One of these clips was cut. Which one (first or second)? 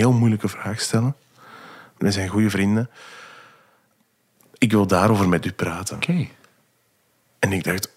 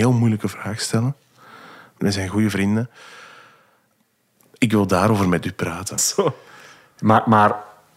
second